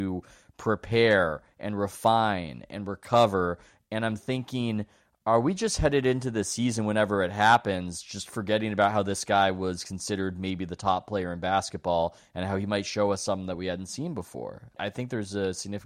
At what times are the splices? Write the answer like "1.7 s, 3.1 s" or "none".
none